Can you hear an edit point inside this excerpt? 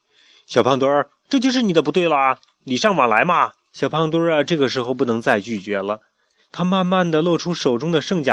yes; 1 cut; at 3.6 s

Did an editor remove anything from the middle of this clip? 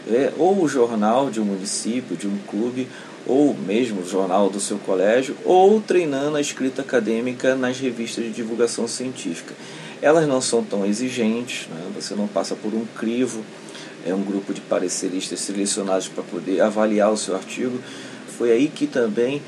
yes; 1 cut; at 18.3 s

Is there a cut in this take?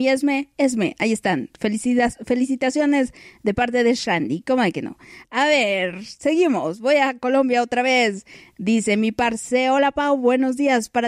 no; 0 cuts

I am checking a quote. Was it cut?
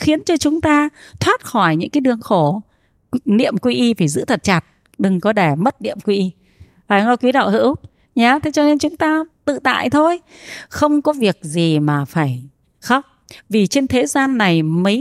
no; 0 cuts

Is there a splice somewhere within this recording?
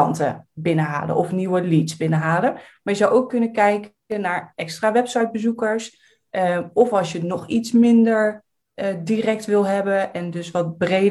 no; 0 cuts

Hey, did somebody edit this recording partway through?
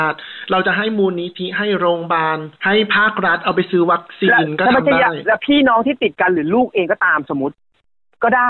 yes; 1 cut; at 2.6 s

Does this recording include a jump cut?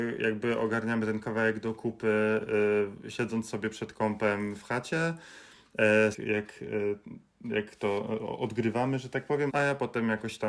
yes; 2 cuts; at 6.1 s, 9.5 s

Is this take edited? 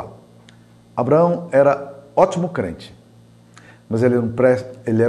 no; 0 cuts

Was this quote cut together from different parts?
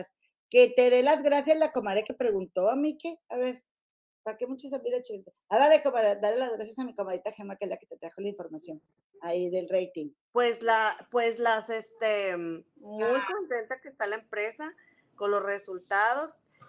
yes; 2 cuts; at 10.2 s, 12.8 s

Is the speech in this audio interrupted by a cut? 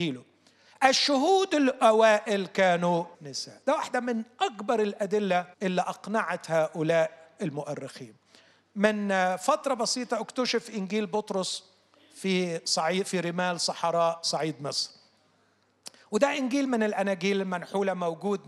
yes; 2 cuts; at 3.1 s, 5.5 s

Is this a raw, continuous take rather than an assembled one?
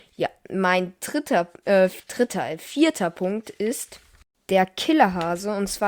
yes; 0 cuts

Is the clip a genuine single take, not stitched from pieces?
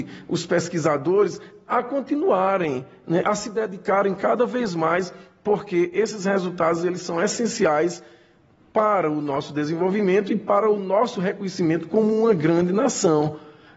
yes; 0 cuts

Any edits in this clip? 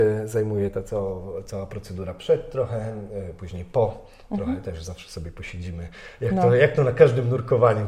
no; 0 cuts

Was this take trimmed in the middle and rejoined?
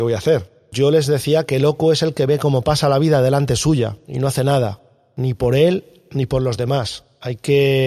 no; 0 cuts

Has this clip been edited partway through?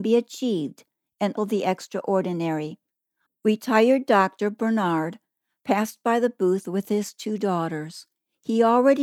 yes; 2 cuts; at 1.4 s, 3.3 s

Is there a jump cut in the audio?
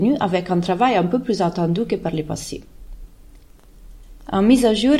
no; 0 cuts

